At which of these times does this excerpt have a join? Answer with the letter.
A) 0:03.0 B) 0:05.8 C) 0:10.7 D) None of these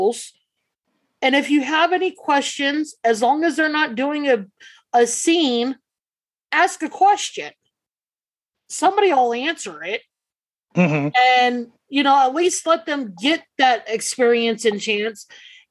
D